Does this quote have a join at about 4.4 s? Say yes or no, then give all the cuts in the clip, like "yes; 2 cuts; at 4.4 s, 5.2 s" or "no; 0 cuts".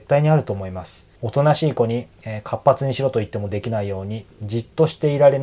no; 1 cut; at 1.2 s